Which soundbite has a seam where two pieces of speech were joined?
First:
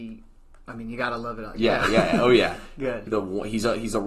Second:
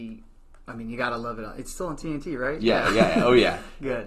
first; 2 cuts; at 1.5 s, 3.1 s

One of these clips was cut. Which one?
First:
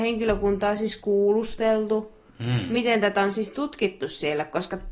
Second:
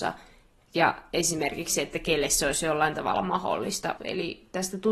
second; 1 cut; at 4.0 s

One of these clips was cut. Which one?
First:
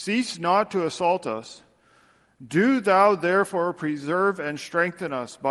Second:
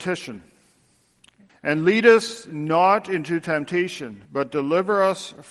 second; 2 cuts; at 1.5 s, 4.2 s

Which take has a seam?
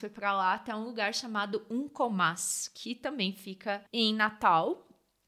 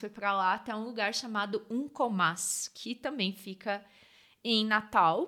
first; 1 cut; at 3.9 s

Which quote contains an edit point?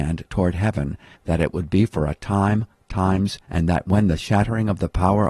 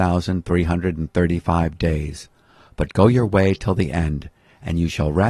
first; 2 cuts; at 1.1 s, 3.4 s

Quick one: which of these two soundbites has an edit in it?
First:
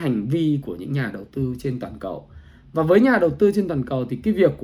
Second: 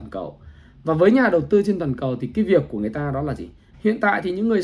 second; 1 cut; at 3.7 s

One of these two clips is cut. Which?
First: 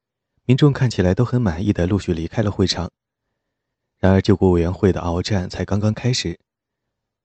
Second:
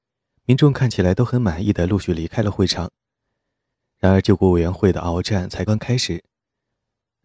second; 1 cut; at 5.7 s

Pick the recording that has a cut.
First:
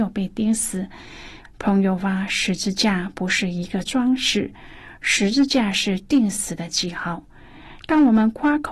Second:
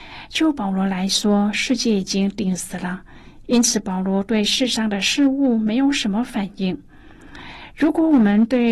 first; 2 cuts; at 1.4 s, 7.8 s

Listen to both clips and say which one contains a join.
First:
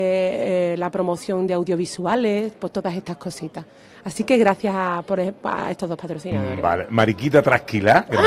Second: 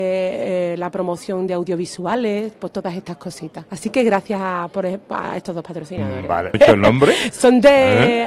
second; 2 cuts; at 3.7 s, 6.5 s

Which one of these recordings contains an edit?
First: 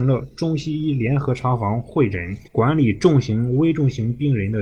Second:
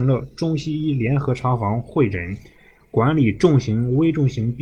first; 1 cut; at 2.5 s

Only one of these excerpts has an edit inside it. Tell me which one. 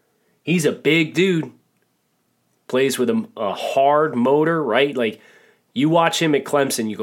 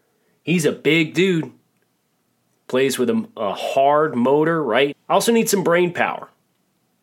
second; 1 cut; at 4.9 s

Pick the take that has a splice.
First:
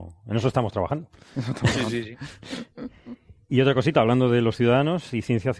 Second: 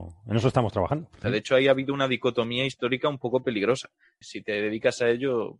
second; 2 cuts; at 1.2 s, 4.2 s

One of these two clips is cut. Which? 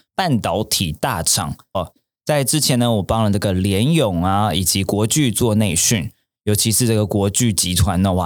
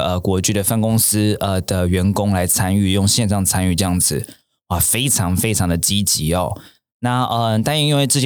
first; 1 cut; at 1.7 s

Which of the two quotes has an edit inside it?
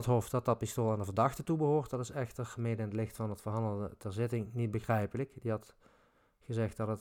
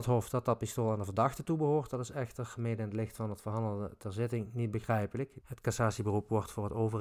second; 1 cut; at 5.4 s

